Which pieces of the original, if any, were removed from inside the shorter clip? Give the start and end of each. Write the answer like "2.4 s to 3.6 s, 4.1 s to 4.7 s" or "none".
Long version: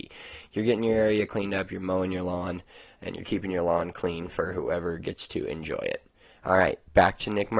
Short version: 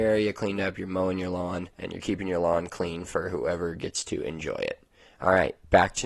2.7 s to 3.0 s